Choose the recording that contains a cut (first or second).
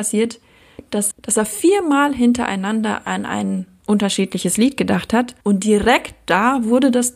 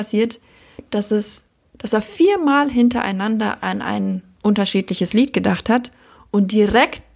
first